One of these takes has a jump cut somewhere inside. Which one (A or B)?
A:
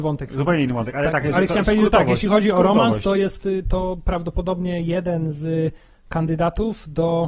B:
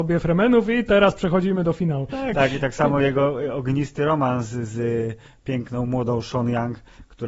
B